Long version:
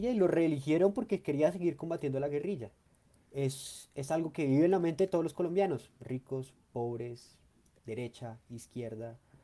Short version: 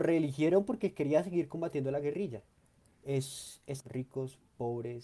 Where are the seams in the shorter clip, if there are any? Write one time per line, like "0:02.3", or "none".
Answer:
0:03.8